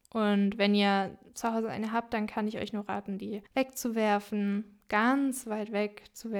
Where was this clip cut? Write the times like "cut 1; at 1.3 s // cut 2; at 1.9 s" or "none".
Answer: cut 1; at 3.5 s

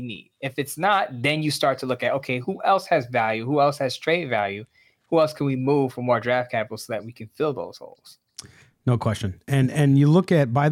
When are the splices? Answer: none

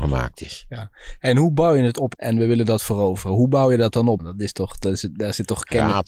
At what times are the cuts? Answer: cut 1; at 2.1 s // cut 2; at 4.2 s

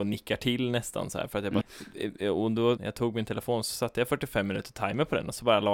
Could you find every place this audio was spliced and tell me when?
cut 1; at 1.6 s // cut 2; at 2.8 s

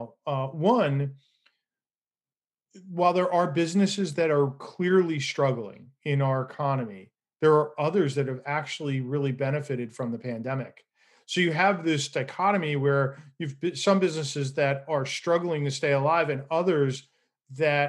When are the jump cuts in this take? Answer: none

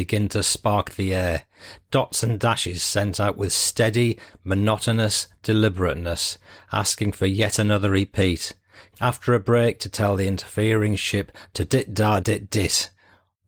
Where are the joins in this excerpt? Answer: cut 1; at 8.9 s // cut 2; at 12.2 s

